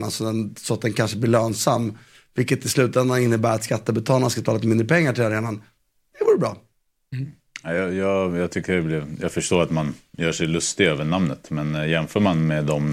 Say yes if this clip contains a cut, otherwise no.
no